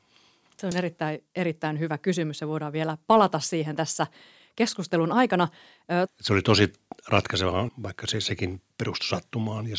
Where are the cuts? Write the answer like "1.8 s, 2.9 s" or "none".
6.1 s, 7.7 s